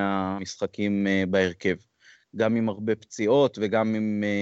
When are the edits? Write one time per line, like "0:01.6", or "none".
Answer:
0:02.2